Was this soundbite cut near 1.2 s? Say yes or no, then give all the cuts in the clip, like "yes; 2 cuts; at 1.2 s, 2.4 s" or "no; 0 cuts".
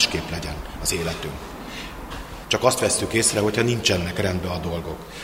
no; 1 cut; at 2.4 s